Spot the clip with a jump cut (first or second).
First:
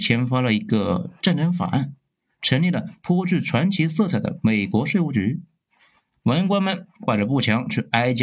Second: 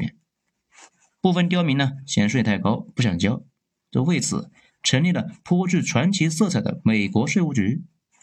second